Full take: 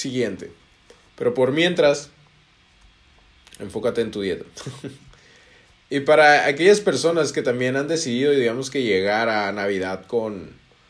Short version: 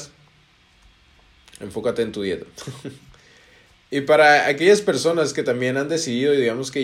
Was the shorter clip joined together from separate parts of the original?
no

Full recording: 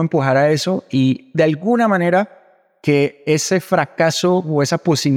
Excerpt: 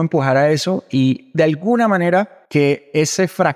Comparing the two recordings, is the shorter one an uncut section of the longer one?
no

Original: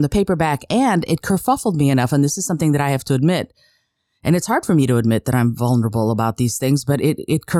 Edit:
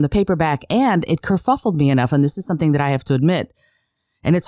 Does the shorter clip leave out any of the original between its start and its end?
no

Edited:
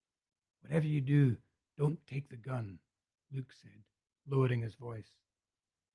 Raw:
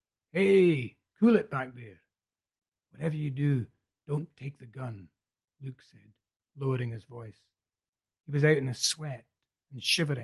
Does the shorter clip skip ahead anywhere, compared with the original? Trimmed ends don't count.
no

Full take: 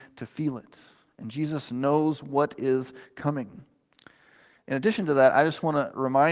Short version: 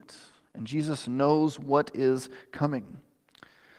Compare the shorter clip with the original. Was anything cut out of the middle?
no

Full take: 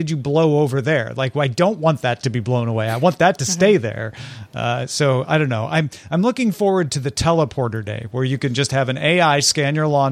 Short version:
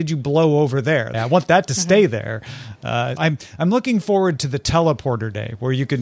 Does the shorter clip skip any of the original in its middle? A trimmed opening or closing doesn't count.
yes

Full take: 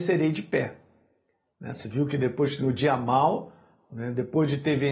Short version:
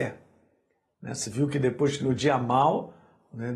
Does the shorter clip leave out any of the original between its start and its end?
no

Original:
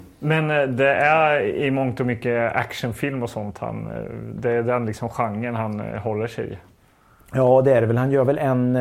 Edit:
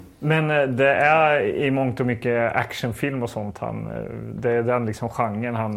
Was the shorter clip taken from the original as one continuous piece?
yes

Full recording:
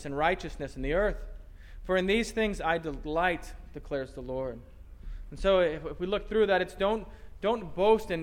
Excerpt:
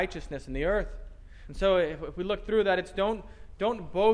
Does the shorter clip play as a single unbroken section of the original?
no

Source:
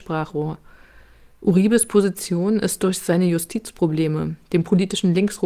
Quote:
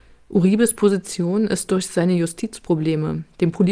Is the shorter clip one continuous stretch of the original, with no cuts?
yes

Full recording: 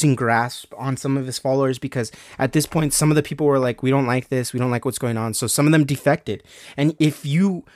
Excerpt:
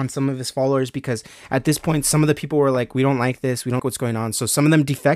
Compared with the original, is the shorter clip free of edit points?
no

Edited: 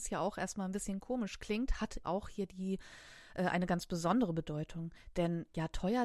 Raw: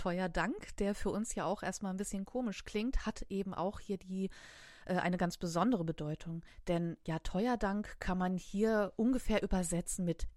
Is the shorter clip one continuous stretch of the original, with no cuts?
no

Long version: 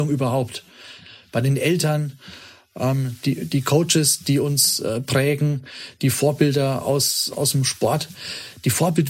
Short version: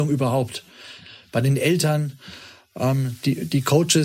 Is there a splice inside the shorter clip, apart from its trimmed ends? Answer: no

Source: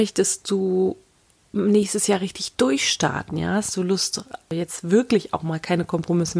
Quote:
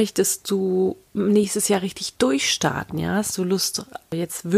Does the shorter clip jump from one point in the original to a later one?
yes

